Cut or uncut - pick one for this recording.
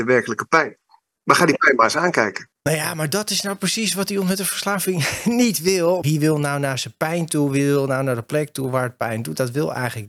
cut